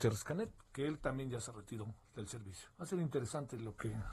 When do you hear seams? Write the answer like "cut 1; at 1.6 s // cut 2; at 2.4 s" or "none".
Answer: cut 1; at 2.7 s